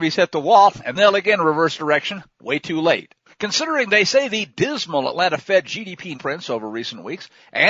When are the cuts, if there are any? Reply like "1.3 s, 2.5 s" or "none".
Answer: 3.3 s, 6.1 s